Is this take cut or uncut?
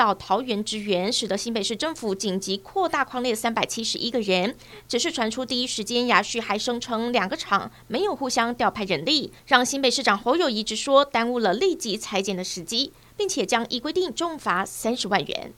uncut